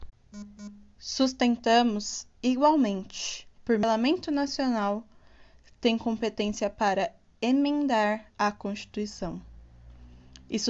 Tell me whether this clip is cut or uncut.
cut